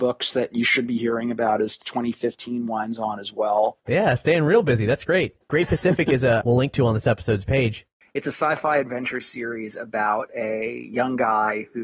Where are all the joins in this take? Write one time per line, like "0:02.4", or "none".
0:03.9
0:05.4
0:06.4

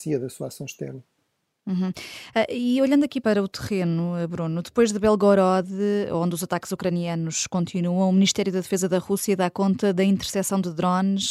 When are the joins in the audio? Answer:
0:03.2

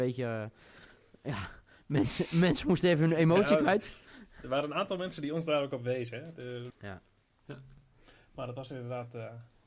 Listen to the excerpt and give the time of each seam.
0:06.7

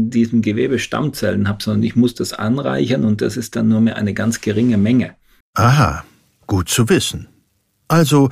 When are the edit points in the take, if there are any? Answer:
0:05.4

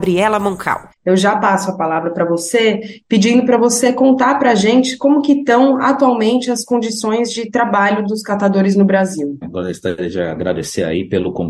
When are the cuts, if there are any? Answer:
0:00.9
0:09.4

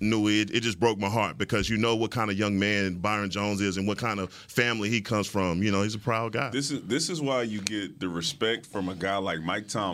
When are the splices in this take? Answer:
none

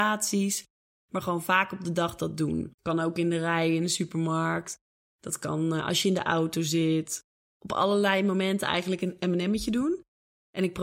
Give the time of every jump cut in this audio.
0:02.7

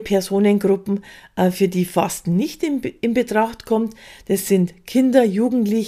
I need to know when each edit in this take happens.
none

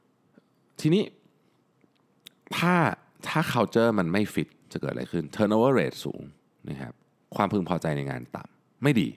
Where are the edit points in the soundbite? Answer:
none

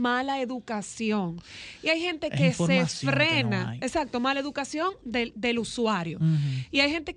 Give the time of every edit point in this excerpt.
none

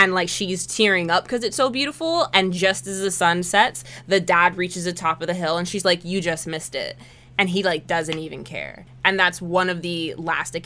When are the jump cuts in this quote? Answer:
none

